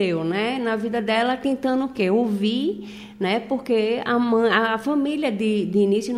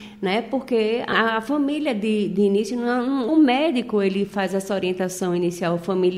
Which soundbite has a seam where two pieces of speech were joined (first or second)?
second